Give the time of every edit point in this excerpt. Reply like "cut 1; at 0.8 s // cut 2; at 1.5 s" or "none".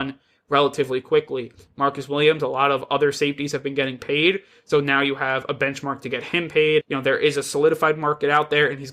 cut 1; at 6.8 s